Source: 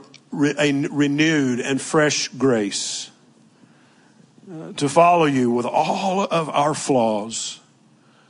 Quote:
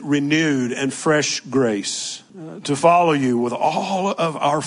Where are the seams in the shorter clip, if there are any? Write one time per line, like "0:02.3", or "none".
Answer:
0:02.3